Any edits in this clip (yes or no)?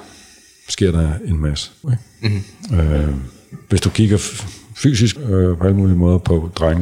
yes